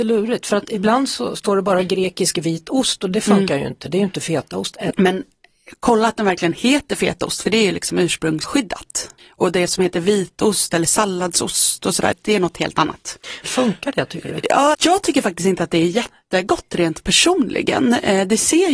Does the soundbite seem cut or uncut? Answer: cut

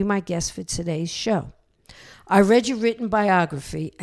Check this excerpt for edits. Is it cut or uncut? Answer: cut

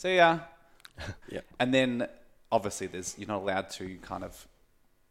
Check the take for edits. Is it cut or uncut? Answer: cut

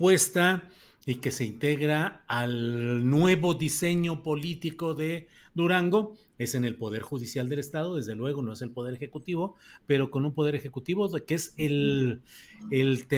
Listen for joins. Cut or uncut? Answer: uncut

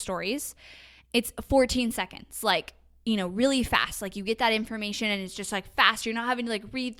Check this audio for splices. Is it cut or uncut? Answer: uncut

